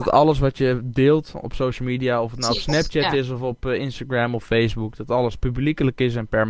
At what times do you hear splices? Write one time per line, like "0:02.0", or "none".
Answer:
none